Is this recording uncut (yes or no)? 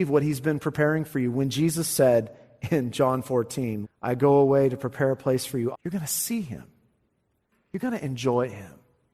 no